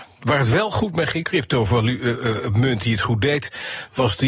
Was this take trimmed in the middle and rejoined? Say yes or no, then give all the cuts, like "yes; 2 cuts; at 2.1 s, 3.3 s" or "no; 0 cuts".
yes; 1 cut; at 1.2 s